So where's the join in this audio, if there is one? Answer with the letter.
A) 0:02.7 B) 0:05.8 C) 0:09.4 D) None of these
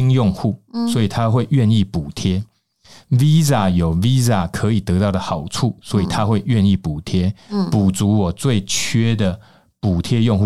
D